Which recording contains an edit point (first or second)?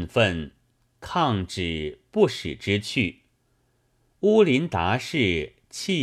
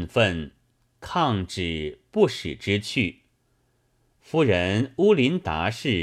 second